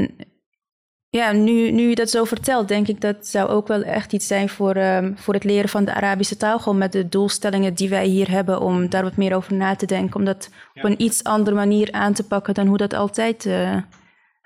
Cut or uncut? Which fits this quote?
uncut